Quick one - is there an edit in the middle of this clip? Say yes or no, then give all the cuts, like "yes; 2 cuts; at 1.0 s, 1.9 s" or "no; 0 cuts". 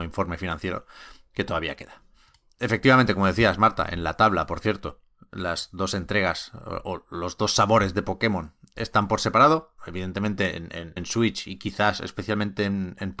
yes; 2 cuts; at 9.8 s, 11.0 s